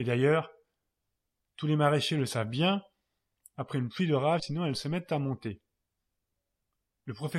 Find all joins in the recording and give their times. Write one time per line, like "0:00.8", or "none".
0:04.4